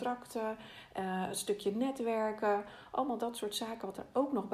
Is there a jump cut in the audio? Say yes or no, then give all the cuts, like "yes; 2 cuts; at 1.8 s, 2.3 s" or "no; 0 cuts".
no; 0 cuts